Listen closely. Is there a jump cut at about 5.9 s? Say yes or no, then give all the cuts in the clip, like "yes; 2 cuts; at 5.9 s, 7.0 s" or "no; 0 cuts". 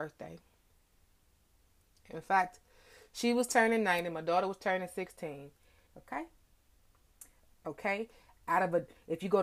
yes; 2 cuts; at 5.9 s, 7.5 s